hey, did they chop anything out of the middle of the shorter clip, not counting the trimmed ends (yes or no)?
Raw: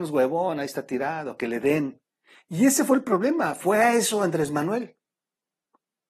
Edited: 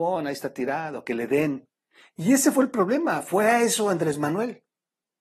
no